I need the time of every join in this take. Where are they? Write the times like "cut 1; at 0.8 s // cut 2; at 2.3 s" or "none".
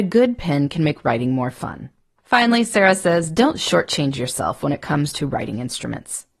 cut 1; at 2.2 s